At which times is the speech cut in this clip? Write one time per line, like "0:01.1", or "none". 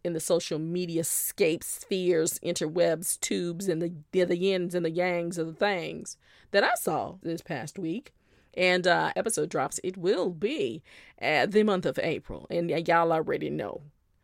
0:07.2
0:09.1

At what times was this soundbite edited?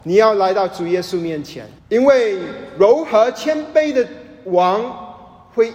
0:01.8

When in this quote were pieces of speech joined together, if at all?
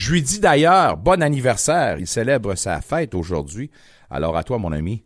none

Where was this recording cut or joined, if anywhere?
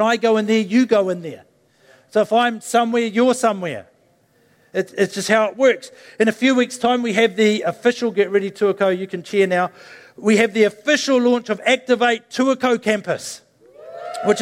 none

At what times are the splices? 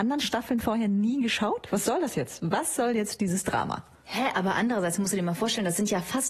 none

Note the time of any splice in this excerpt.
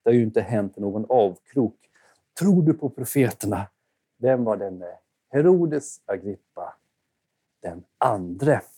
0:04.0

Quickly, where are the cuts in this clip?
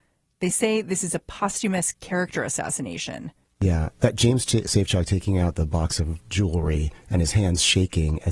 0:03.4

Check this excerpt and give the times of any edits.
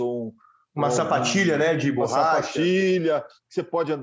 none

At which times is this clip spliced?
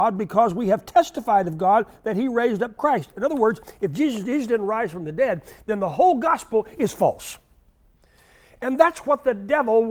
none

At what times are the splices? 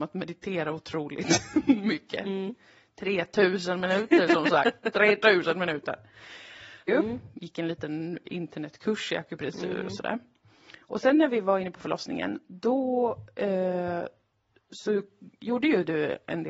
0:06.9

